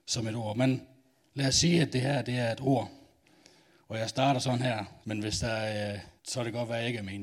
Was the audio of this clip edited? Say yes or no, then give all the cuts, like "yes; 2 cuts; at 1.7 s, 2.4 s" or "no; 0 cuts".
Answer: yes; 2 cuts; at 5.0 s, 6.2 s